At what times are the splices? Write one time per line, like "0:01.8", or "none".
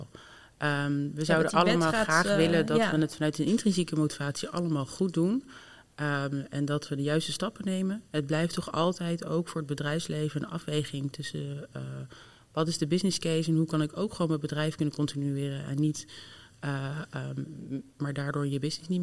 0:18.0